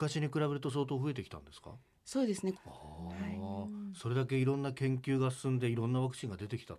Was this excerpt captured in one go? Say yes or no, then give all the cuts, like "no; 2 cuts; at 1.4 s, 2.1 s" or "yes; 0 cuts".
no; 1 cut; at 2.5 s